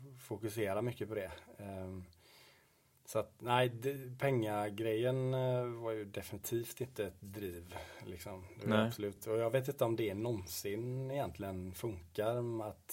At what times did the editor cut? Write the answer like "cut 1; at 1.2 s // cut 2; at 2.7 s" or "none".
none